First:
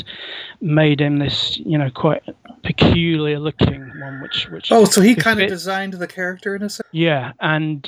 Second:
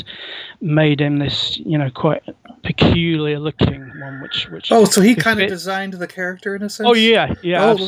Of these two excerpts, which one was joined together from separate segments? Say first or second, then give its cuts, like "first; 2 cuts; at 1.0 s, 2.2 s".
first; 1 cut; at 6.8 s